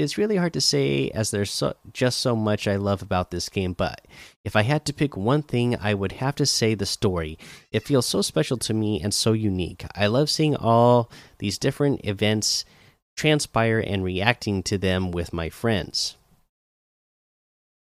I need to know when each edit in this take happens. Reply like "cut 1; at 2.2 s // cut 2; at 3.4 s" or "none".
none